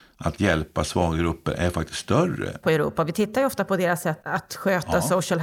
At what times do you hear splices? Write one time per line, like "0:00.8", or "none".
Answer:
0:02.6
0:04.2